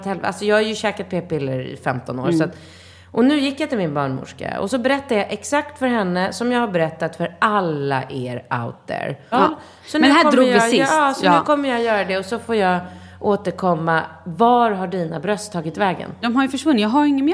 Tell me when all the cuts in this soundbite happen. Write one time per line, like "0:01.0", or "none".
0:09.3
0:16.2